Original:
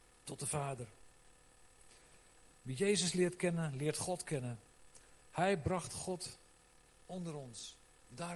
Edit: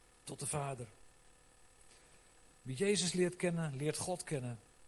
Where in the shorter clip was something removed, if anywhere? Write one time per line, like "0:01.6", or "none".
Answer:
none